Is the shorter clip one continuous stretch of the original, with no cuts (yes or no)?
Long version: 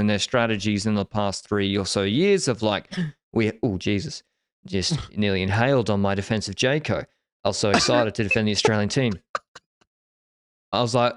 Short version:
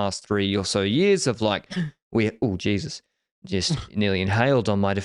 yes